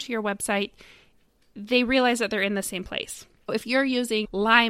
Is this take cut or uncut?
uncut